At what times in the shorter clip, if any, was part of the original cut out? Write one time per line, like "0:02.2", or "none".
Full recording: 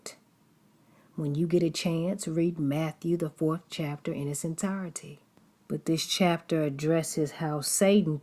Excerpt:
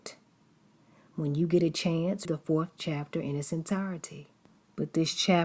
0:02.2